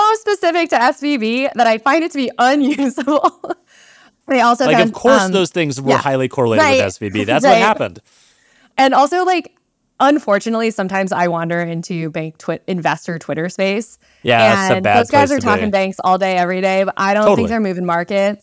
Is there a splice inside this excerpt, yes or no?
no